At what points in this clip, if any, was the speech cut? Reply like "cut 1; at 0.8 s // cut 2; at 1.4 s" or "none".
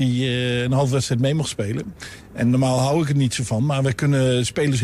none